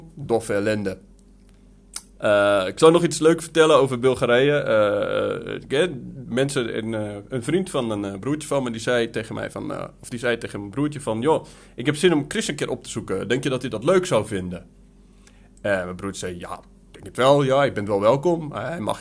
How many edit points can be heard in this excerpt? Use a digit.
0